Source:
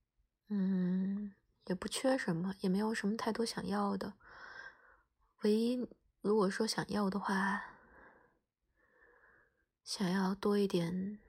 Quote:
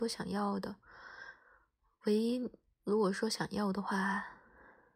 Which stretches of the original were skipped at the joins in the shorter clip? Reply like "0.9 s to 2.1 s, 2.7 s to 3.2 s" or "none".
none